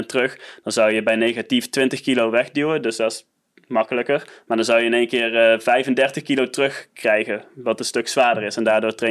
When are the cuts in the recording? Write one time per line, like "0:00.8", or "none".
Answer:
none